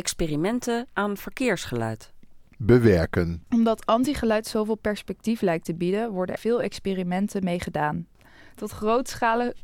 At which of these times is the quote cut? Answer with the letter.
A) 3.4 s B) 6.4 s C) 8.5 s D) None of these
B